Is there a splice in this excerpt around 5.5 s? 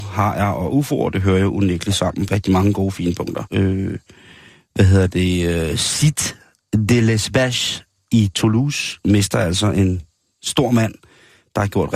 no; 2 cuts; at 2.3 s, 3.5 s

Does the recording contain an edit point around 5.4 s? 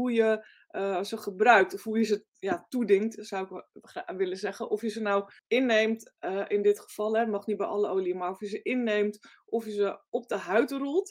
yes; 1 cut; at 5.4 s

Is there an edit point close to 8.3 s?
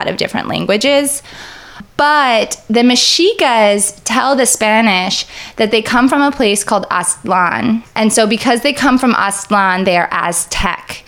no; 0 cuts

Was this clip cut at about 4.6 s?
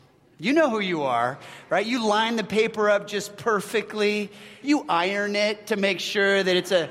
yes; 1 cut; at 4.6 s

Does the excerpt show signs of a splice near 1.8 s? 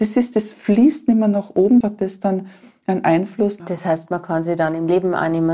yes; 2 cuts; at 1.8 s, 3.6 s

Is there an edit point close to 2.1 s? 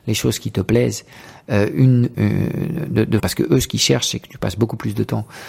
yes; 2 cuts; at 2.1 s, 3.2 s

